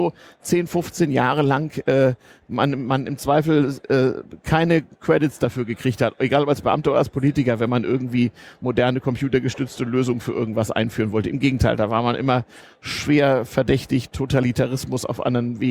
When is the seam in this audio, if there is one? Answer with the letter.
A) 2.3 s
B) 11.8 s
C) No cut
C